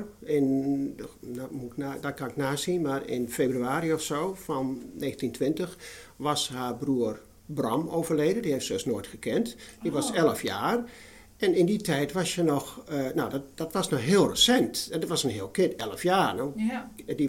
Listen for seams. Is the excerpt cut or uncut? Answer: uncut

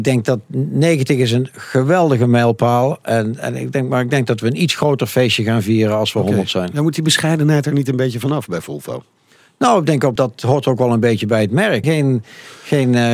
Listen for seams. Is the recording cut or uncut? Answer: cut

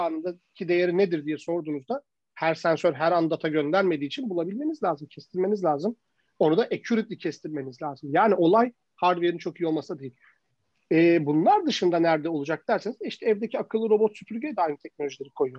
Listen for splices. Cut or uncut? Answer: cut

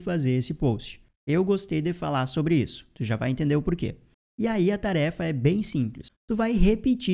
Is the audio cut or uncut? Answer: uncut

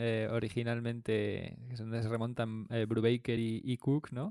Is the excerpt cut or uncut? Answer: uncut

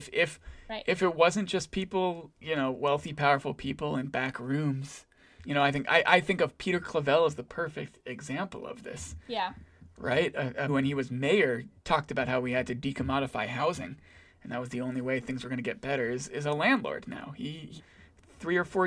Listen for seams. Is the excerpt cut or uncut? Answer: cut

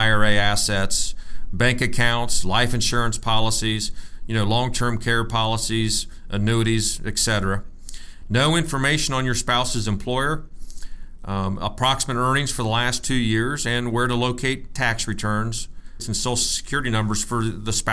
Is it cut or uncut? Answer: cut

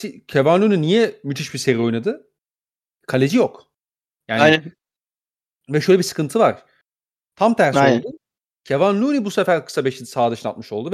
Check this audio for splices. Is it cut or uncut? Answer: cut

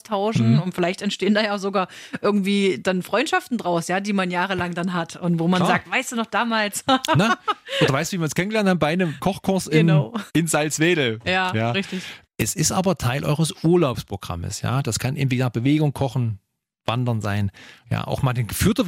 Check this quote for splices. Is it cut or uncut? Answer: uncut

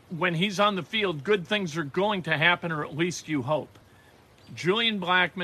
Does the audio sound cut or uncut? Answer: uncut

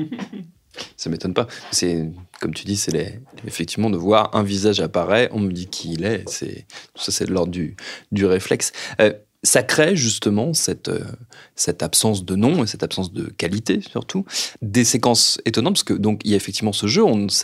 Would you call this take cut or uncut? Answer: cut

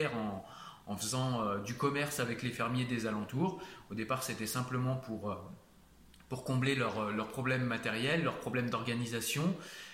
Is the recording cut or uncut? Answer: uncut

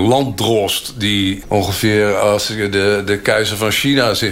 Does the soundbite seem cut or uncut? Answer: cut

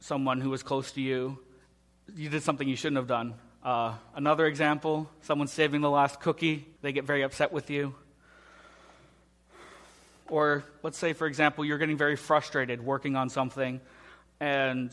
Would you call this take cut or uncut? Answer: cut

